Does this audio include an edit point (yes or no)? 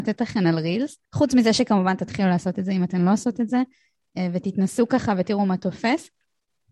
yes